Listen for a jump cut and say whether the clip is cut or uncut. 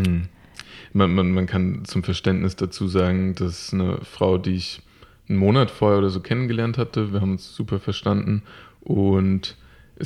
uncut